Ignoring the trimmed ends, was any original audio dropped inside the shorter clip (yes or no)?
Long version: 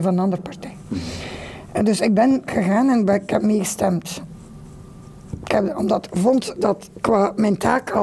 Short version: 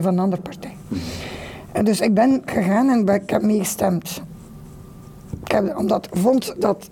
no